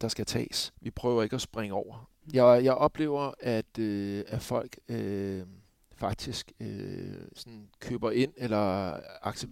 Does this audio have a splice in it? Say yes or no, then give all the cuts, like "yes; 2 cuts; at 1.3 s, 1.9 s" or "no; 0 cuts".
yes; 1 cut; at 2.1 s